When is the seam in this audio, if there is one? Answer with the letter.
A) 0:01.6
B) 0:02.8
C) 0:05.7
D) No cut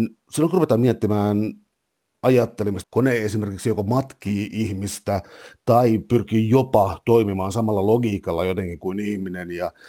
B